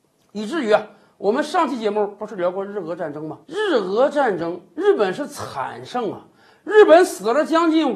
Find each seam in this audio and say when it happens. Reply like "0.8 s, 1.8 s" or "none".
3.4 s